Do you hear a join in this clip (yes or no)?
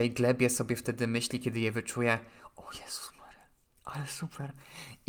no